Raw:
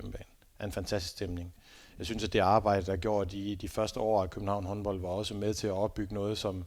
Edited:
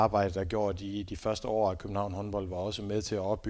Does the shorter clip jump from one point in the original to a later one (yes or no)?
no